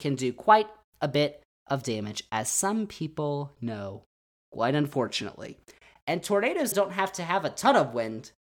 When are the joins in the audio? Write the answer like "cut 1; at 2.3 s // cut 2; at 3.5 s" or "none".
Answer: cut 1; at 6.7 s